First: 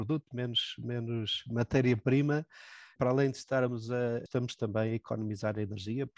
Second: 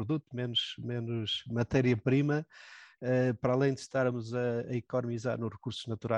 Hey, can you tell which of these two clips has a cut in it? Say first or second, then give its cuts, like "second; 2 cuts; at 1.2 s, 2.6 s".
first; 2 cuts; at 3.0 s, 4.3 s